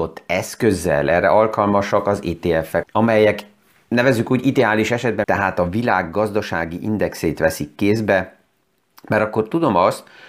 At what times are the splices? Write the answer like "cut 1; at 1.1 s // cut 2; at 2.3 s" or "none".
cut 1; at 2.8 s // cut 2; at 5.2 s

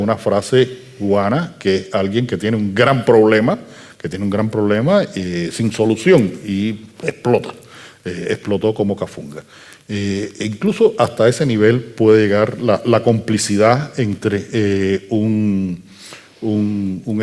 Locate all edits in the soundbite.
none

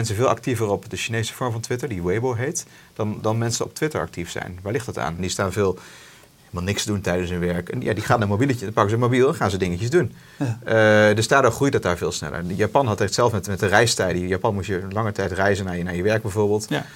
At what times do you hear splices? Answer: cut 1; at 5.2 s

